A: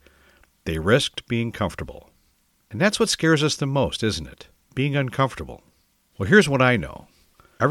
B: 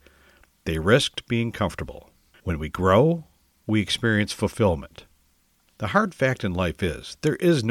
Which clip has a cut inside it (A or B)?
B